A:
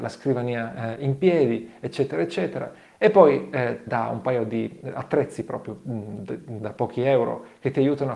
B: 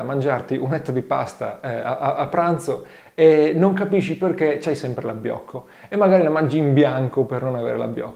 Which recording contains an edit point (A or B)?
A